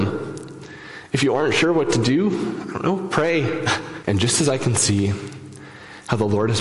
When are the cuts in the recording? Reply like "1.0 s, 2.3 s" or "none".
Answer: 4.0 s